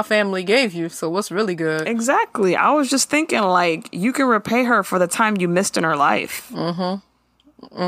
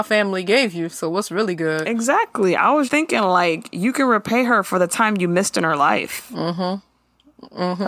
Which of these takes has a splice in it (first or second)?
second